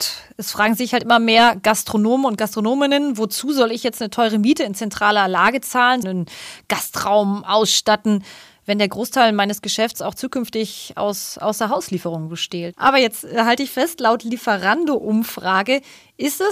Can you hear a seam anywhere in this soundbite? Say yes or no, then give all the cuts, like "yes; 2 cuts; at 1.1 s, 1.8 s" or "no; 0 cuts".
yes; 2 cuts; at 6.0 s, 12.7 s